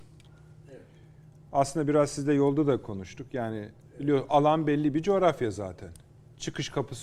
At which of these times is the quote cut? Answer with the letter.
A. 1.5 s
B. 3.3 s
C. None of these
C